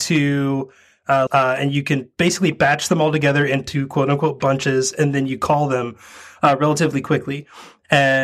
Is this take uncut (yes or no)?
no